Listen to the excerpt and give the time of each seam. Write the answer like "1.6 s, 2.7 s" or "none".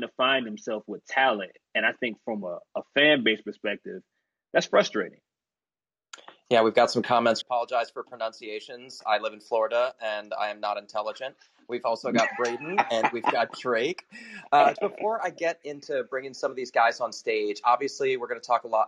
7.4 s, 14.8 s